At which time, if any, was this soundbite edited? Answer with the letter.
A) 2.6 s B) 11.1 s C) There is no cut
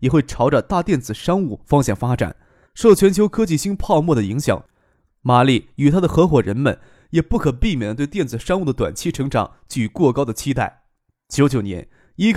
A